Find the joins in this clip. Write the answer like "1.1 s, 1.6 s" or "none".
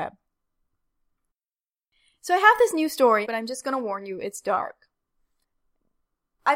3.2 s